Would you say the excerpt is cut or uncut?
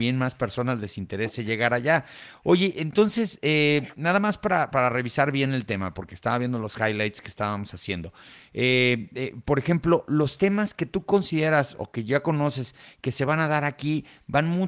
uncut